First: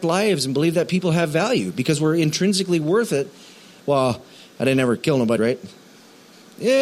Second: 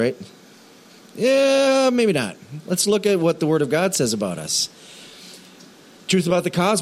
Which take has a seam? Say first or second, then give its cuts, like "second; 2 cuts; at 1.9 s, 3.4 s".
first; 2 cuts; at 3.8 s, 5.4 s